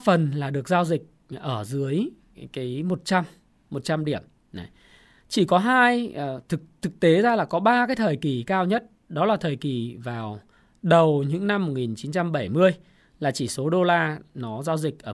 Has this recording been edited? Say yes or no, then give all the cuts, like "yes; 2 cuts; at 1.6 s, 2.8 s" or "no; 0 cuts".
no; 0 cuts